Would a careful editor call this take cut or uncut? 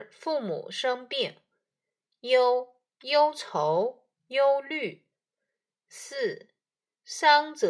uncut